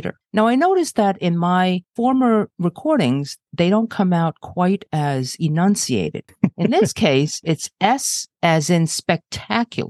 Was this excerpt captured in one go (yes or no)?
no